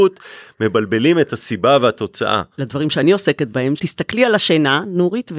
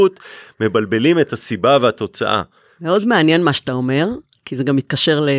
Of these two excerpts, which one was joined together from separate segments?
first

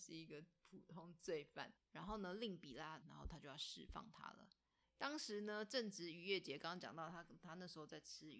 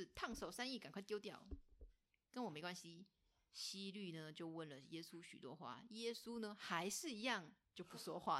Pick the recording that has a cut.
first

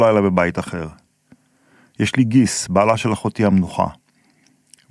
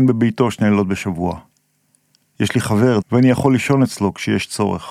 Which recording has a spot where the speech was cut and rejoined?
second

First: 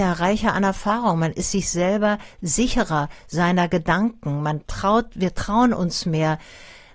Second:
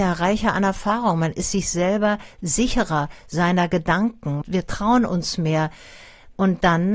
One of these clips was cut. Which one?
second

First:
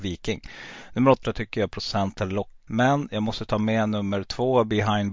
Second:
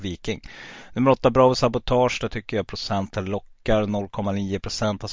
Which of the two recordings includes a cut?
first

